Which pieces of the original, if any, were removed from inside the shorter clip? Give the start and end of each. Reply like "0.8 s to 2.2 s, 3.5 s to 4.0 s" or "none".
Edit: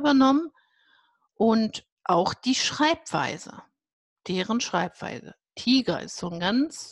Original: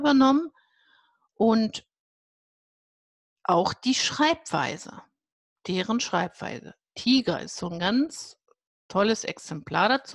1.9 s to 3.3 s